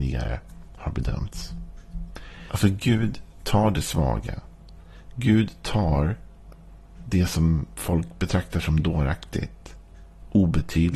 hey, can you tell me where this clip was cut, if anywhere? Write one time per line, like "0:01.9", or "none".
0:02.5